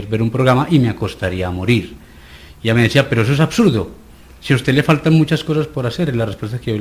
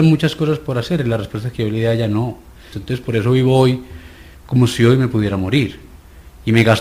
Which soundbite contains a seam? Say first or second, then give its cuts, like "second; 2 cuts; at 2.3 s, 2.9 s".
second; 1 cut; at 2.7 s